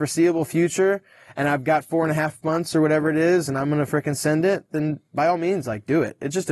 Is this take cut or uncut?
cut